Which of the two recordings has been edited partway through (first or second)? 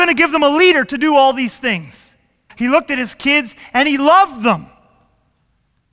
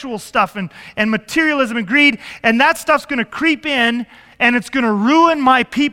first